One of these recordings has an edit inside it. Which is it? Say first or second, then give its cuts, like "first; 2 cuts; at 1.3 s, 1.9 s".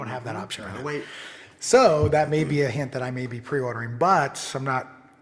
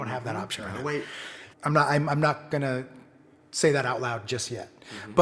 second; 1 cut; at 1.5 s